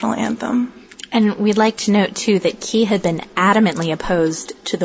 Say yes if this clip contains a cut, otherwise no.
no